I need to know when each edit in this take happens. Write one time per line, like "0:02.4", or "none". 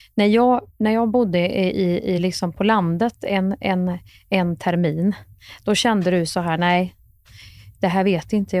none